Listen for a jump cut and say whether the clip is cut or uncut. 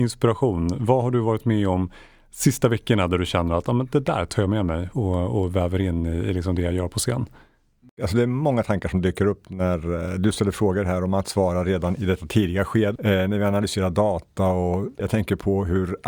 cut